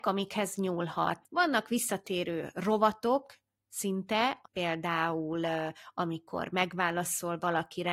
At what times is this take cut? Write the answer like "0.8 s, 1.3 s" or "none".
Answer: 1.2 s, 4.4 s